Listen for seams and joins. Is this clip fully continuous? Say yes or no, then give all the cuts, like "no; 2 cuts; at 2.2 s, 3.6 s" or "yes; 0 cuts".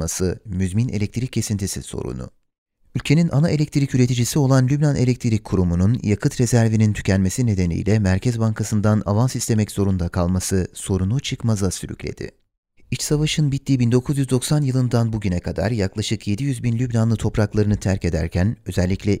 no; 1 cut; at 12.8 s